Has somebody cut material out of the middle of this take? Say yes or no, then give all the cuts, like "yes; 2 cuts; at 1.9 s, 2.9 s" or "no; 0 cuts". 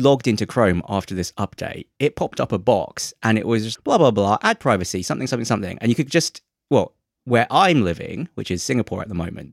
yes; 1 cut; at 3.8 s